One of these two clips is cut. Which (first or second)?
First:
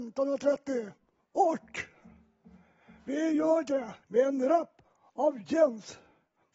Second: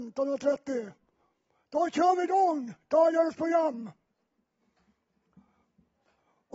first